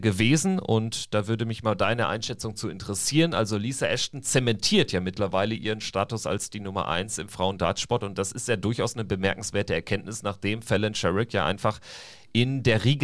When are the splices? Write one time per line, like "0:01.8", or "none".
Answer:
none